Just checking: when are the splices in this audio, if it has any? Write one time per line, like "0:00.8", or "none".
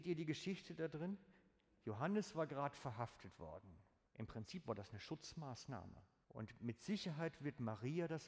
0:04.1
0:06.2